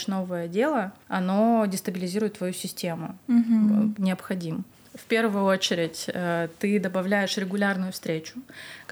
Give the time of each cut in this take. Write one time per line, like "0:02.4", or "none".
0:04.0